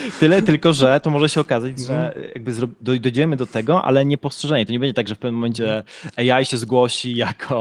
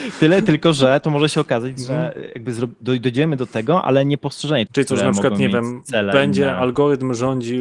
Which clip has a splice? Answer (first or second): second